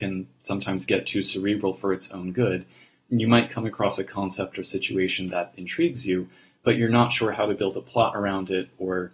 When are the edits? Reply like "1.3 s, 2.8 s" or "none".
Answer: none